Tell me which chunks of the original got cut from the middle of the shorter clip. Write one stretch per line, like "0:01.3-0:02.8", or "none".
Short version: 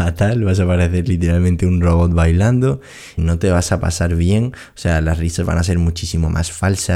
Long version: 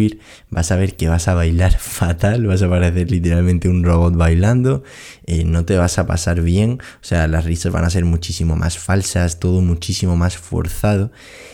0:05.2-0:05.4